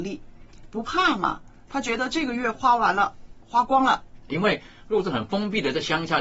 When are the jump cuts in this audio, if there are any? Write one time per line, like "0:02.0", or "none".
0:04.3